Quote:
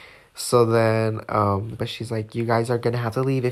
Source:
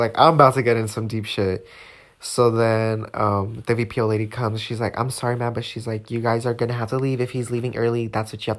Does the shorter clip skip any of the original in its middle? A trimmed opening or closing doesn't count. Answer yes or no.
yes